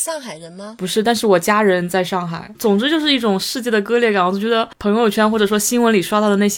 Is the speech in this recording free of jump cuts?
no; 1 cut; at 2.5 s

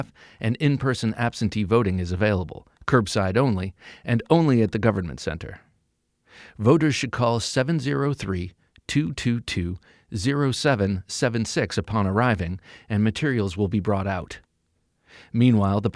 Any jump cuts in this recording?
no; 0 cuts

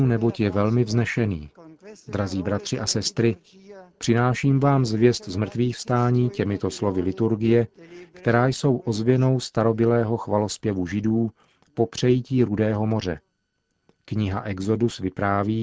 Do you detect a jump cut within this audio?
no; 0 cuts

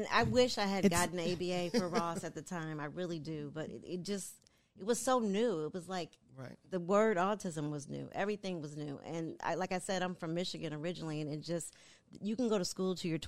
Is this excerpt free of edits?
yes; 0 cuts

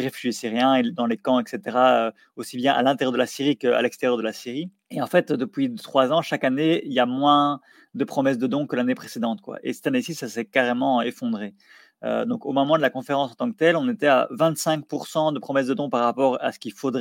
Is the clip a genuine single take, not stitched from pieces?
yes; 0 cuts

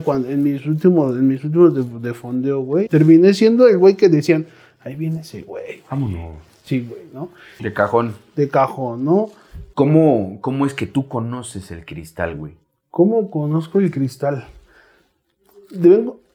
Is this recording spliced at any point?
yes; 3 cuts; at 2.9 s, 7.6 s, 9.7 s

